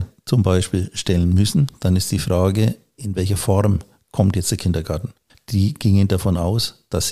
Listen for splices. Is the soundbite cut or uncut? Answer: cut